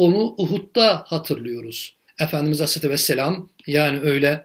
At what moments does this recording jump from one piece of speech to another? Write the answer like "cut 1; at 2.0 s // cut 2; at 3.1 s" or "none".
cut 1; at 2.1 s